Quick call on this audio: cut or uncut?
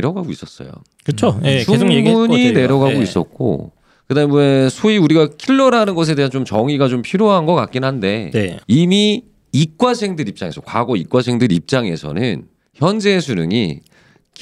cut